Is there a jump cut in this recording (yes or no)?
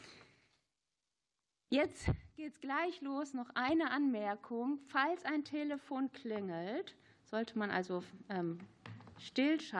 no